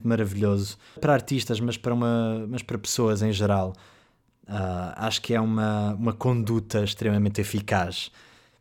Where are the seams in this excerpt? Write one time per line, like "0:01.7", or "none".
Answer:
0:01.0